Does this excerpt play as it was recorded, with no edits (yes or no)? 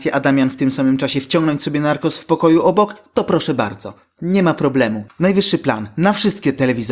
yes